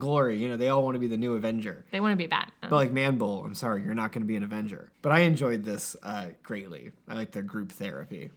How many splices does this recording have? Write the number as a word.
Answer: one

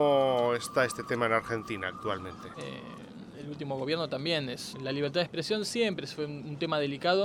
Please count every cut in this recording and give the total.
two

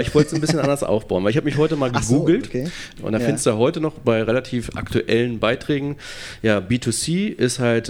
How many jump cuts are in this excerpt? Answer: one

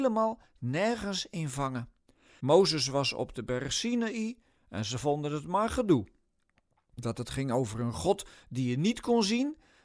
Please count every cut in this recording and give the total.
one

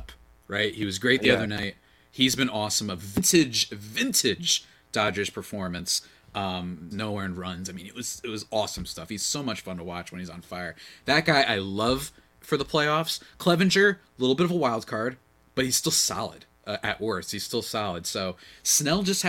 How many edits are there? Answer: one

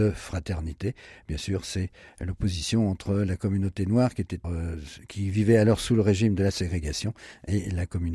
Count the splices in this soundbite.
one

